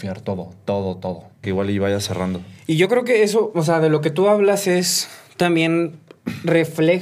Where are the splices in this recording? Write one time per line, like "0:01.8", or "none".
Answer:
0:01.4